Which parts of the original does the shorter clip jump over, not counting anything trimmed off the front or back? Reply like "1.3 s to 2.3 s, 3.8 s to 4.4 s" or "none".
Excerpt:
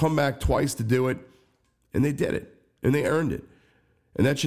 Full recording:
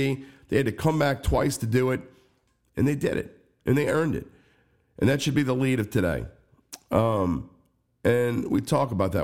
none